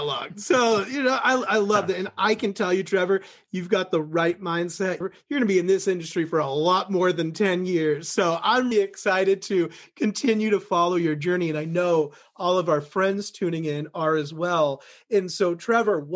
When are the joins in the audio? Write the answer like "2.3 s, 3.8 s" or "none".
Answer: 5.0 s, 8.7 s